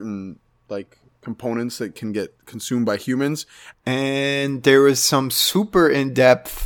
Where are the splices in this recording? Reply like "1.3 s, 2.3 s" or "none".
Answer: 3.7 s